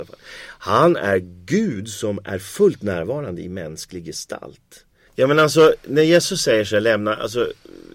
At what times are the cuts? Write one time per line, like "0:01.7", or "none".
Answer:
0:05.1